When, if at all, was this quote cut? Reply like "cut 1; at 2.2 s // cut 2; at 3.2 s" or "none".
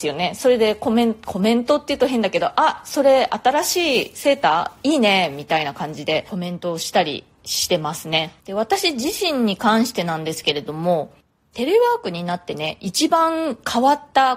cut 1; at 8.4 s

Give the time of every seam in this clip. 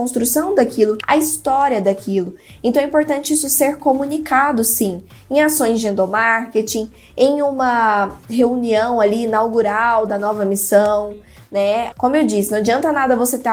cut 1; at 1.0 s // cut 2; at 11.9 s

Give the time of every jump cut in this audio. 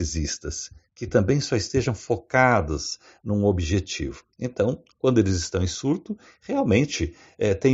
none

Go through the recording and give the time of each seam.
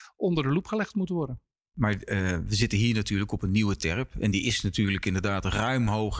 none

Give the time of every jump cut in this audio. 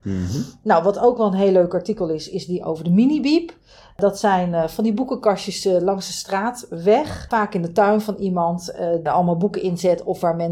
cut 1; at 9.1 s

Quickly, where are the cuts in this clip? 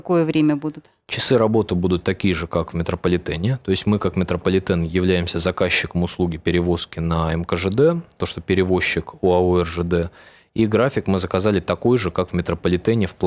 cut 1; at 8.2 s

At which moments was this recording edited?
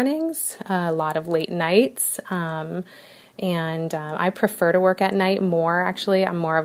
none

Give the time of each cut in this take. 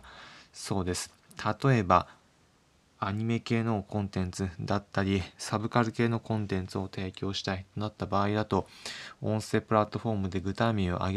none

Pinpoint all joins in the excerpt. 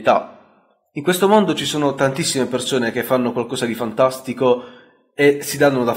none

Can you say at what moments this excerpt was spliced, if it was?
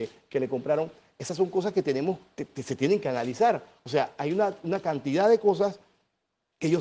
none

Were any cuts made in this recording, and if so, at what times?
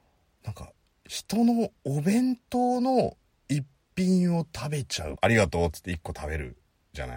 cut 1; at 5.1 s

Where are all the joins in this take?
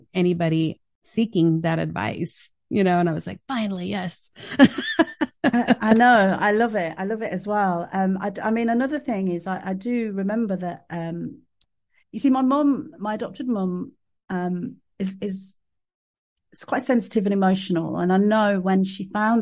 none

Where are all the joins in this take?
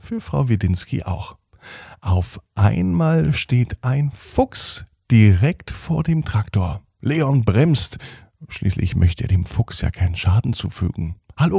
none

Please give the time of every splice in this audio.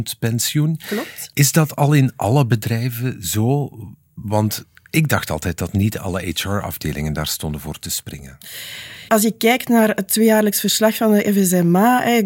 cut 1; at 9.1 s

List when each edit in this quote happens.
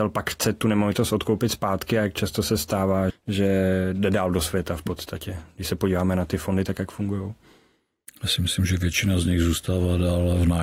cut 1; at 3.1 s // cut 2; at 6.7 s

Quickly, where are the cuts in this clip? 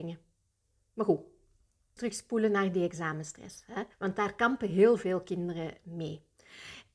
cut 1; at 2.0 s // cut 2; at 3.9 s

